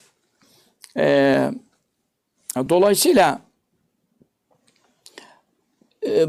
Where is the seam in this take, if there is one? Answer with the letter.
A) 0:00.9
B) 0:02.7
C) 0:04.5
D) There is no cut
D